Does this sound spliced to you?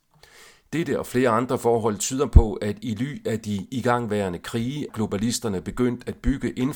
yes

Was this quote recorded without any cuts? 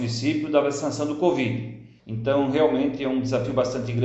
no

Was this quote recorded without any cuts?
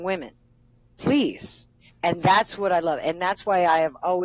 no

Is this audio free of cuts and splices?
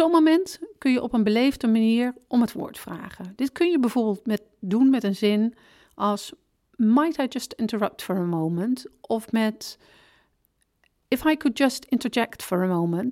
yes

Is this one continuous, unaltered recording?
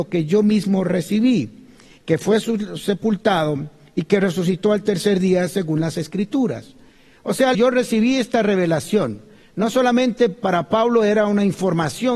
no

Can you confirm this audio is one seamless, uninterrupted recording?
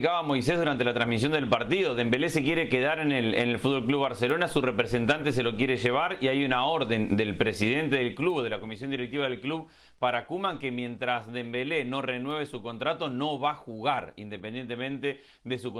yes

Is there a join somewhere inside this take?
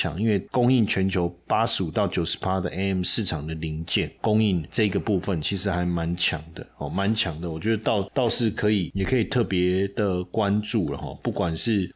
no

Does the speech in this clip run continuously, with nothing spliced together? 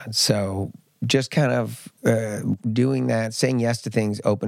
no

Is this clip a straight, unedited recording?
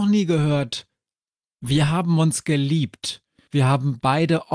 no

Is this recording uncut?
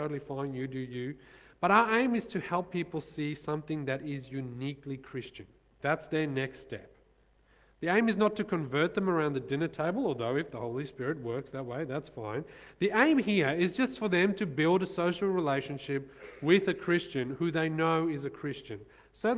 no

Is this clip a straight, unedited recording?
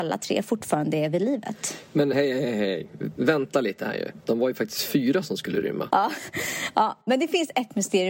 no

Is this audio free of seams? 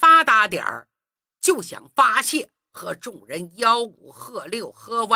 yes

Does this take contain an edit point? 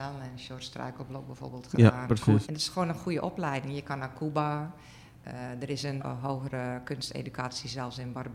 yes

